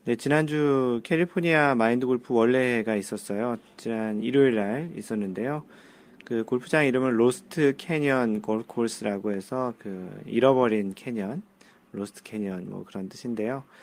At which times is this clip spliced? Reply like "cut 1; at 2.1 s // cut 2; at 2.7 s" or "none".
none